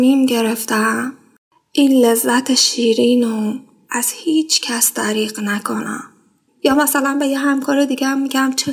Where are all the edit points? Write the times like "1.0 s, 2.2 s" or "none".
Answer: 6.5 s